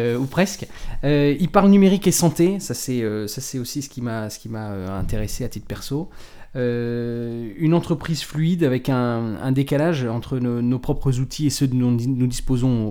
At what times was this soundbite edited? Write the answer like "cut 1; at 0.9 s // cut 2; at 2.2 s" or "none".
none